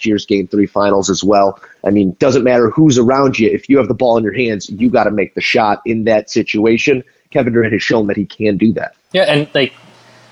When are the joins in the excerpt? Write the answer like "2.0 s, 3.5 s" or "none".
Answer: none